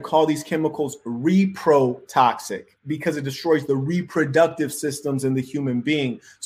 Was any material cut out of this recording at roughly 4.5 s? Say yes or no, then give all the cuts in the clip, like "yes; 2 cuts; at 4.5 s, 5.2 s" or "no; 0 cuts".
no; 1 cut; at 2.8 s